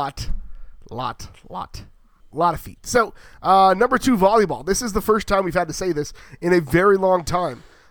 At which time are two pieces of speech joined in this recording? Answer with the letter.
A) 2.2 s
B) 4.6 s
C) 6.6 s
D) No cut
A